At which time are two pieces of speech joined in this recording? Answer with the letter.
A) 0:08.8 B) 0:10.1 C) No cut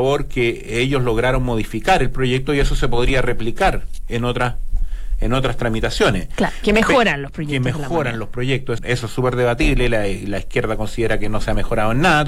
A